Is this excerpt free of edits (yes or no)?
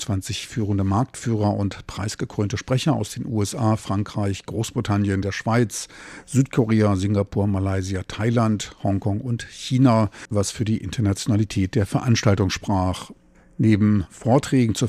no